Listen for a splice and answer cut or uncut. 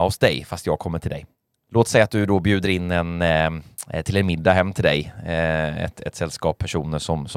uncut